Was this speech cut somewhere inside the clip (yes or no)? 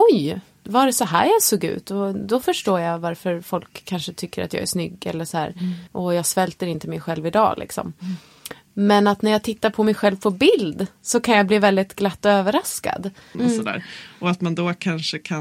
yes